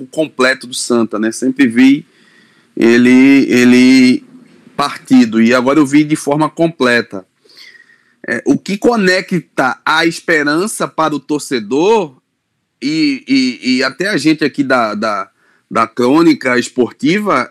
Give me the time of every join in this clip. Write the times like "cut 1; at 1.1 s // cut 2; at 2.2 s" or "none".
none